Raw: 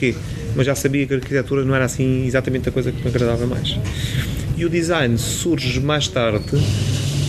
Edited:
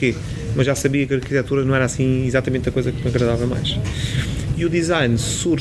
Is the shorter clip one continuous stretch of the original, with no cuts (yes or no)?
yes